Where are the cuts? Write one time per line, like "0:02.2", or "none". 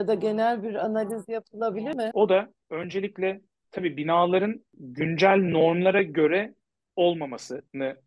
0:02.1
0:04.7